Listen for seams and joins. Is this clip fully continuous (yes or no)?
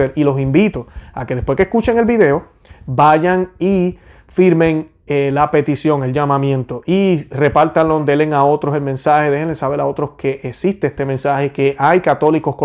yes